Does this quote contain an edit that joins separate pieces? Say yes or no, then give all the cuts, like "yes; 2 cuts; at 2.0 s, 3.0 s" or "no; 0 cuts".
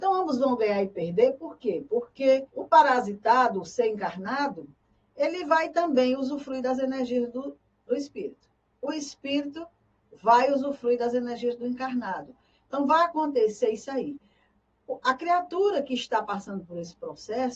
yes; 1 cut; at 2.5 s